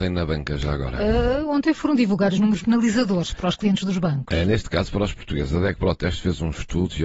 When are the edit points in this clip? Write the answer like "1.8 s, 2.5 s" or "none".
2.6 s